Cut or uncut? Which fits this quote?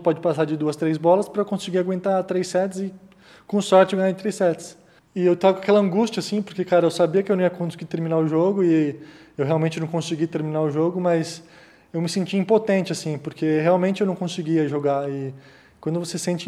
cut